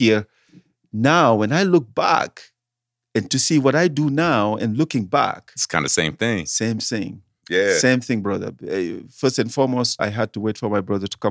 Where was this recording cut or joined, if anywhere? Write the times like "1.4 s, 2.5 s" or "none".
10.0 s